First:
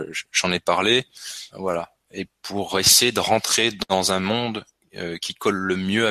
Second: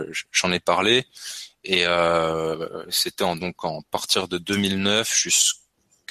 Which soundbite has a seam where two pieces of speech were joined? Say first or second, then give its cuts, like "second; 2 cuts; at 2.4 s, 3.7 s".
first; 1 cut; at 1.5 s